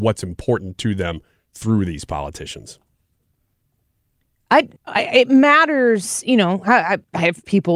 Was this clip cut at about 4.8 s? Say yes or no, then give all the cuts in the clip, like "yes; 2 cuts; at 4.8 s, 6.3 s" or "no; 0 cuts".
yes; 1 cut; at 4.8 s